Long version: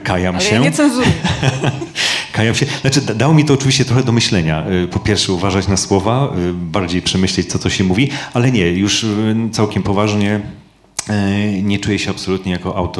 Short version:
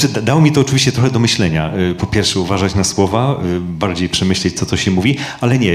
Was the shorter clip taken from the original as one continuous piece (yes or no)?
yes